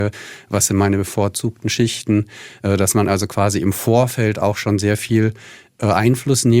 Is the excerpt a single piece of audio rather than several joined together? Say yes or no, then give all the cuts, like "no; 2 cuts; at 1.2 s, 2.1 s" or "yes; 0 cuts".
yes; 0 cuts